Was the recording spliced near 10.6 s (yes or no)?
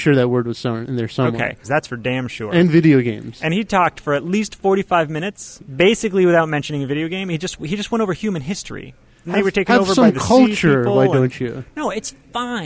no